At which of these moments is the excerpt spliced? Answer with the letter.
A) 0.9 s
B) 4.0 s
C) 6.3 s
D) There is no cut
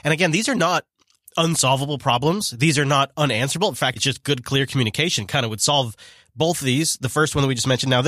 B